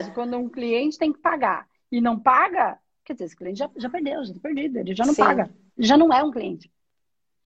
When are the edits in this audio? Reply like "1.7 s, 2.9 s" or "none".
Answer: none